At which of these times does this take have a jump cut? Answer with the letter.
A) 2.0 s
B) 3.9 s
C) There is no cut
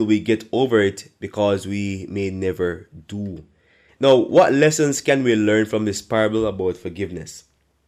B